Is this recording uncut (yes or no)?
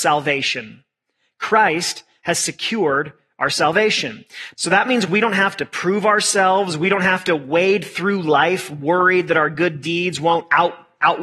no